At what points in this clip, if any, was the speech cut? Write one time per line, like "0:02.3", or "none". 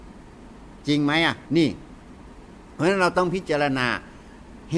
0:01.4